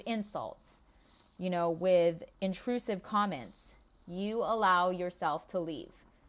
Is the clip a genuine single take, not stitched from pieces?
yes; 0 cuts

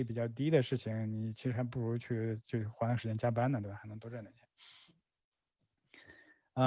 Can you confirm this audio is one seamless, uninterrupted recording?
yes; 0 cuts

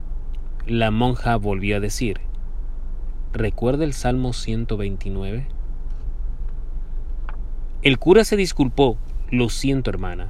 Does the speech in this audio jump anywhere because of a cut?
yes; 1 cut; at 3.3 s

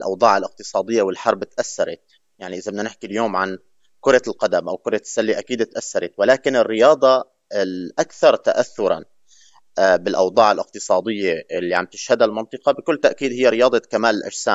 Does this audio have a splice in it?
no; 0 cuts

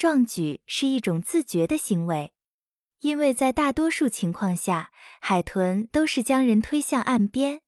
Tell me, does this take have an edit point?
no; 0 cuts

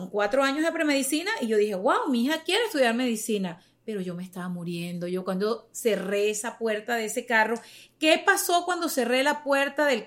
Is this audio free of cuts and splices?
yes; 0 cuts

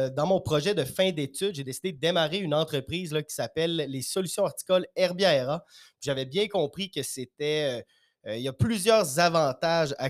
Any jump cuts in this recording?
no; 0 cuts

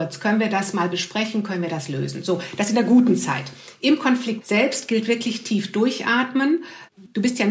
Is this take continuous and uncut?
yes; 0 cuts

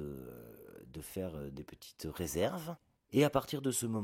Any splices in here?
yes; 1 cut; at 3.0 s

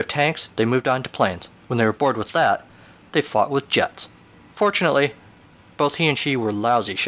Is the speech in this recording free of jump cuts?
no; 1 cut; at 1.6 s

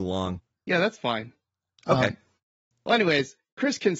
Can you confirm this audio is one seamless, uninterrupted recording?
yes; 0 cuts

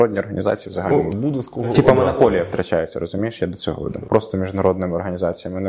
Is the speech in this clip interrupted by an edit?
yes; 2 cuts; at 1.1 s, 4.0 s

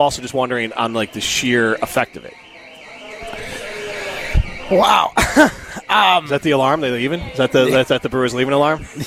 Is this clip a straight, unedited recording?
yes; 0 cuts

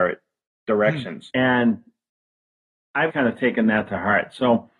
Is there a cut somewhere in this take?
yes; 2 cuts; at 1.3 s, 3.1 s

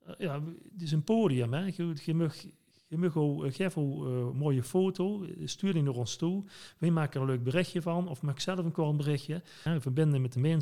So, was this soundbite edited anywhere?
yes; 1 cut; at 9.7 s

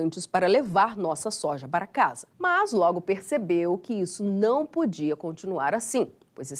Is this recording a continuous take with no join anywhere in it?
no; 1 cut; at 2.3 s

